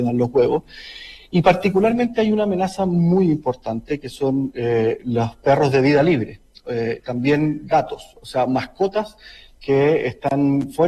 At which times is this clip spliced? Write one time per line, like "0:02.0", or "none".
none